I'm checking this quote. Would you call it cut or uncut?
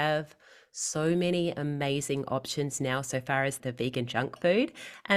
cut